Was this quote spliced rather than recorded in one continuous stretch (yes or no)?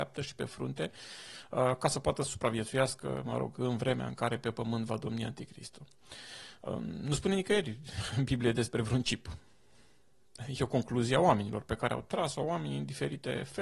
no